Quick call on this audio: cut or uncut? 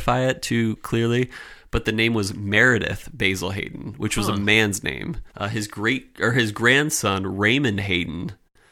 cut